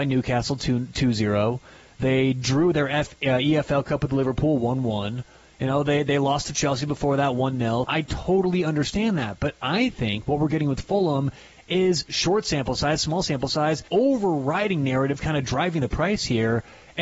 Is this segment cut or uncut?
cut